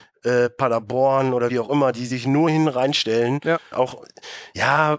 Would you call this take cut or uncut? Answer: cut